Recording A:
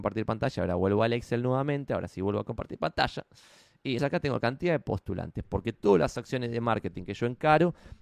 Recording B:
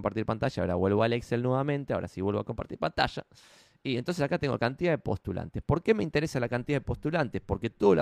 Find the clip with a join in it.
A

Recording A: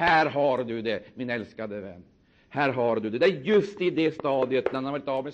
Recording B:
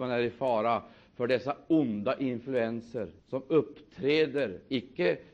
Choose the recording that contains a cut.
B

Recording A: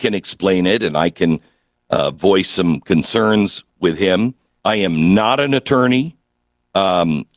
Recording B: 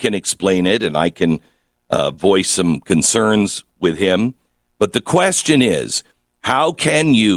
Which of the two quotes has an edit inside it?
A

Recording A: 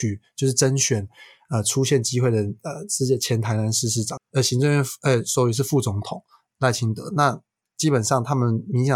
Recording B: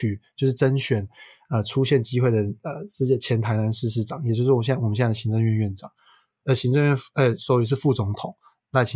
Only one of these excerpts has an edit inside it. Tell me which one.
A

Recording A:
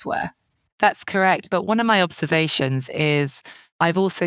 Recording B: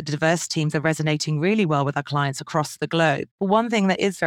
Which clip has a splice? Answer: B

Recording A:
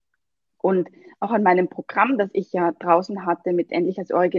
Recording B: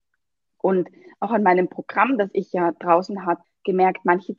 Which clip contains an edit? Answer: B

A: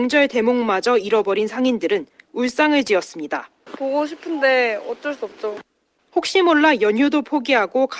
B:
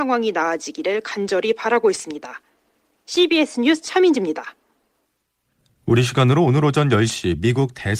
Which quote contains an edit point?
A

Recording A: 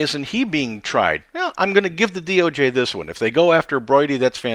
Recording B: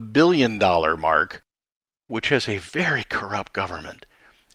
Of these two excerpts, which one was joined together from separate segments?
B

